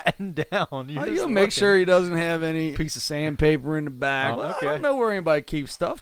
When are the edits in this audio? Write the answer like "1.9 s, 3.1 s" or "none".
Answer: 2.7 s, 4.3 s